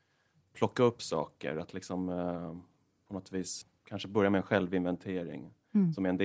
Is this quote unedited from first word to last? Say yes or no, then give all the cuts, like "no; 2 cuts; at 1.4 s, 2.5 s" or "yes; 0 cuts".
yes; 0 cuts